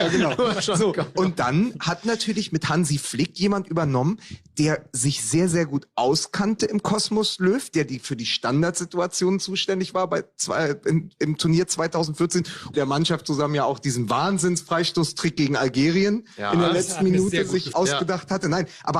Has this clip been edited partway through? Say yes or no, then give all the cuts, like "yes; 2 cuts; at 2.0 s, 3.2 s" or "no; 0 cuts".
yes; 2 cuts; at 12.7 s, 17.7 s